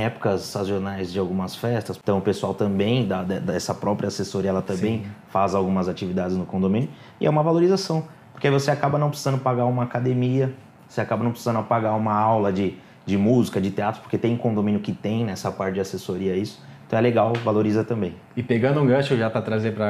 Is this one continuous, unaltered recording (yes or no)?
yes